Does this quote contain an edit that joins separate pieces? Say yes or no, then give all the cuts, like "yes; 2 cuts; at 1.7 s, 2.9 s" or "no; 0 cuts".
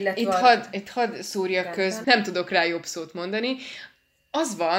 yes; 1 cut; at 2.0 s